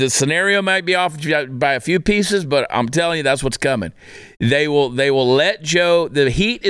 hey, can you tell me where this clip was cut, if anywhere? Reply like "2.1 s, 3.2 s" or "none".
none